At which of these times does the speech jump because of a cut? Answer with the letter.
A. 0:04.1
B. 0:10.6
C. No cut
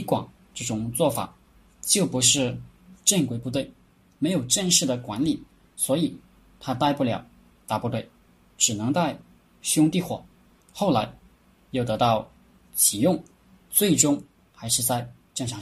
B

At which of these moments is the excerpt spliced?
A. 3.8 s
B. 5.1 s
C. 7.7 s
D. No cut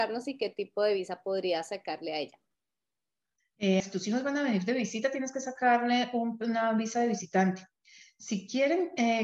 A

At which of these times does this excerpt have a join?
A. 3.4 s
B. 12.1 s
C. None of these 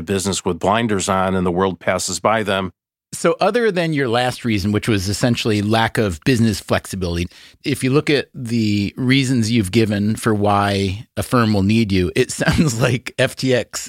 C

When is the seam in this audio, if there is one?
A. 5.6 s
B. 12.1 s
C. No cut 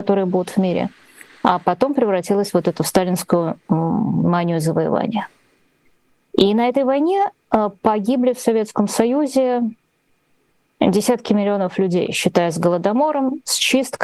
C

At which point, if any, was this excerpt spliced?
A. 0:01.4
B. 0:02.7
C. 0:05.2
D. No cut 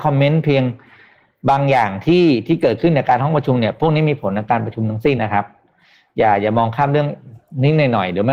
C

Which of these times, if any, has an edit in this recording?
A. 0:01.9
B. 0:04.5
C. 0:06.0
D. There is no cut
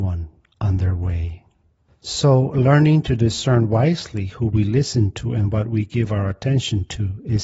A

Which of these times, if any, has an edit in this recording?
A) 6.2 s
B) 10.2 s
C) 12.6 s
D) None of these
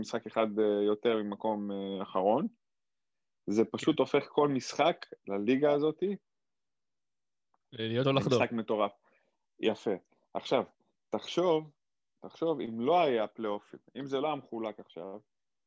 D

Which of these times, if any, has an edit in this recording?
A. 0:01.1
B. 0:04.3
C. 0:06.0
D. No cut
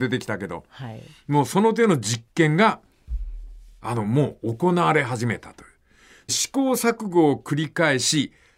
D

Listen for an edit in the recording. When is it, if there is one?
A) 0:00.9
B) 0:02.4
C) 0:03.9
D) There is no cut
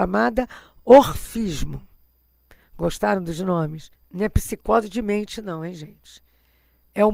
C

